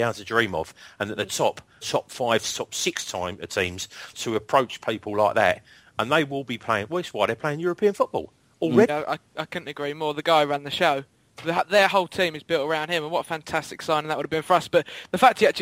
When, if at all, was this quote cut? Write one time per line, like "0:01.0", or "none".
0:01.8
0:04.1
0:08.9